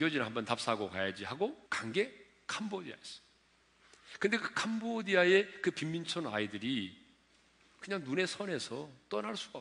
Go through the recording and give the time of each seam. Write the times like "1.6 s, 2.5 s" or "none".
1.7 s